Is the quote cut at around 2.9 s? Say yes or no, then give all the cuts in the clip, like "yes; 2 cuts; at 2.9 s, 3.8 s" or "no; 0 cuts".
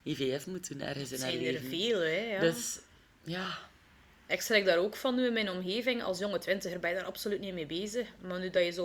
no; 0 cuts